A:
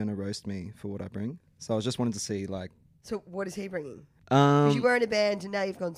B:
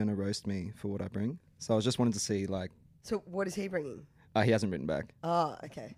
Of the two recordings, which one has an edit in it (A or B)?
A